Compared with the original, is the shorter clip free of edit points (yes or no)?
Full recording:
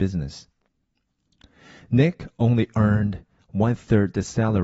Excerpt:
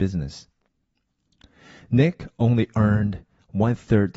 yes